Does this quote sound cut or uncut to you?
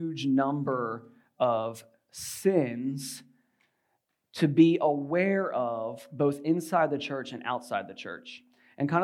uncut